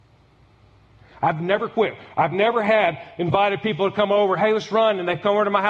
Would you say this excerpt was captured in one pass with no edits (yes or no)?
yes